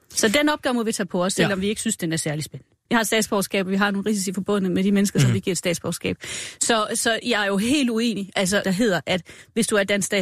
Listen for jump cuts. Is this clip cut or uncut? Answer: cut